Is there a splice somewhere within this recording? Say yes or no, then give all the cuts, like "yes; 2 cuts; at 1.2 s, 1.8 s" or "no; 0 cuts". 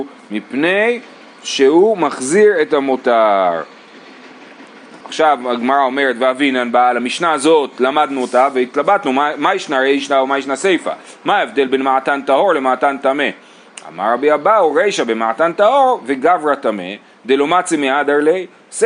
yes; 1 cut; at 5.0 s